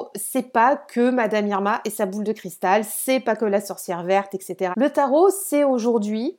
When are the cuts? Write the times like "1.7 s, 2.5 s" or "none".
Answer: 4.7 s